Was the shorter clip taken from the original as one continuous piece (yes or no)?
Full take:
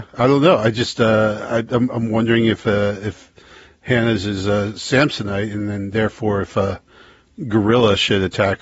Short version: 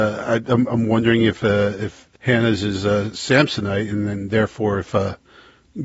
no